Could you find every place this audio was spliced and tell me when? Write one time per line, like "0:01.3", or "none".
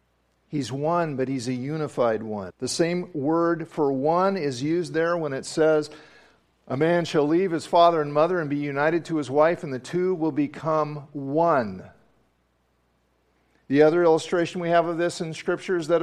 0:02.5

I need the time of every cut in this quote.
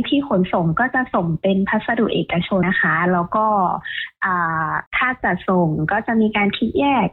0:02.6

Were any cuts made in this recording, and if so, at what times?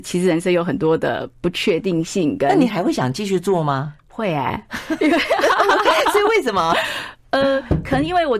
none

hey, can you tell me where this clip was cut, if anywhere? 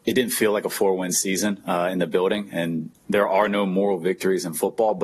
none

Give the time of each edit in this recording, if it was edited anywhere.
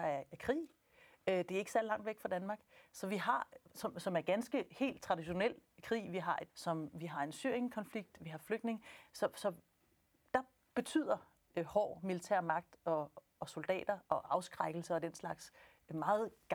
0:06.5

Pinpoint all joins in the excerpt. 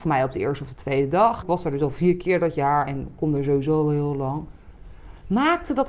0:01.4

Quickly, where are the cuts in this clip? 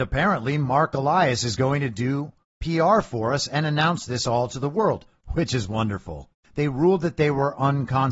0:06.4

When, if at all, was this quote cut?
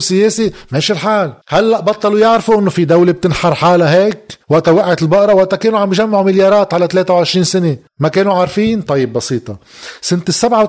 0:01.4
0:04.4
0:07.9

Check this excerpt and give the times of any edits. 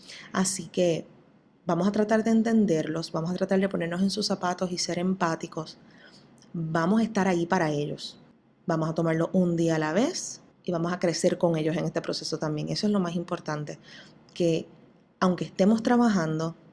0:10.5

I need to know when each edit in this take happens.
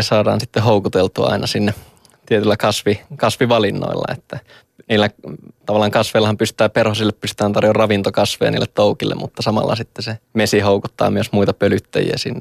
0:10.2

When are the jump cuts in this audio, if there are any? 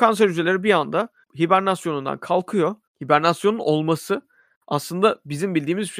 0:02.9

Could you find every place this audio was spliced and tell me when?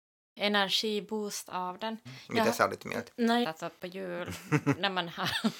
0:02.1
0:03.4

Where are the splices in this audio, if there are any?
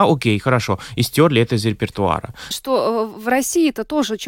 0:02.5

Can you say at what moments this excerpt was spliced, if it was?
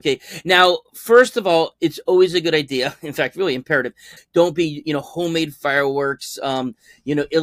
0:04.2

